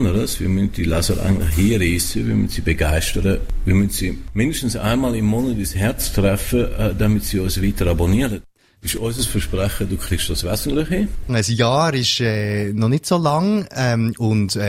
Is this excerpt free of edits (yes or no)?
no